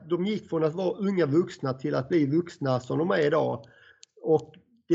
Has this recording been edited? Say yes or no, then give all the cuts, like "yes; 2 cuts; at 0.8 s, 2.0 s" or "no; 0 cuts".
no; 0 cuts